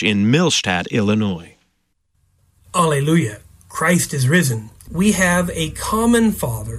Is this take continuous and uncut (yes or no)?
no